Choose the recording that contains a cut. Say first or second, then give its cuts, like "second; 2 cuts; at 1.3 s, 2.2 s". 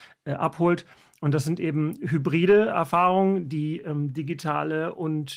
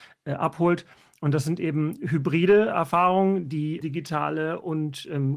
second; 1 cut; at 3.8 s